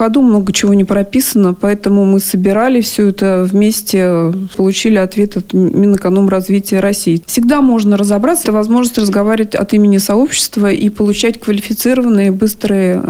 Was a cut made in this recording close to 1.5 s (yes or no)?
no